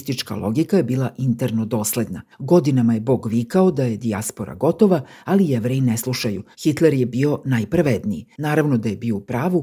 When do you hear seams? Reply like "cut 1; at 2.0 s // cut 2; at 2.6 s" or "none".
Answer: cut 1; at 2.3 s // cut 2; at 6.5 s // cut 3; at 8.3 s